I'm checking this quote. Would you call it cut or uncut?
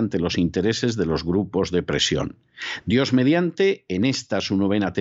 cut